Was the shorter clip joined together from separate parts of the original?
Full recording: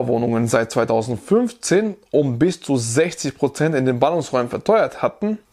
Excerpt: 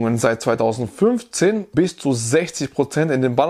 yes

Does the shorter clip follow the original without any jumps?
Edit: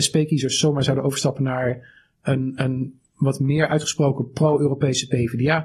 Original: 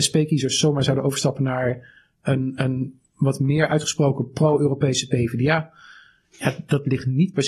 yes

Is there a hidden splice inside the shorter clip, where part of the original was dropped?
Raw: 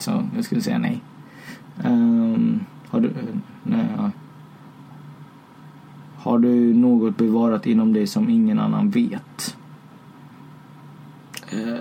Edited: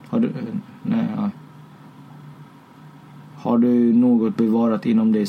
no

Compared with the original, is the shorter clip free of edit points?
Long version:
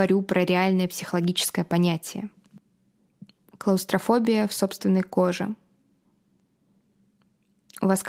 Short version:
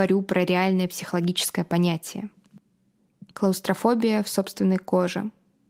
no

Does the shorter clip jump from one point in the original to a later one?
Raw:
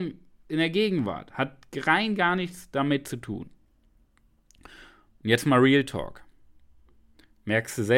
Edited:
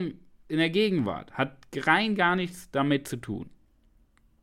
no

